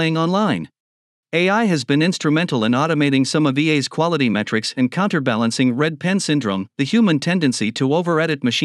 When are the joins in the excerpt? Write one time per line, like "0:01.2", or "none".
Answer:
0:01.2
0:06.7